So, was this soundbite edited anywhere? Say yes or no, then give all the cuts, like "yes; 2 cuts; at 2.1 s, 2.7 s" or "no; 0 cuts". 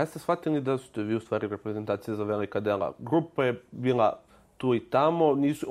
no; 0 cuts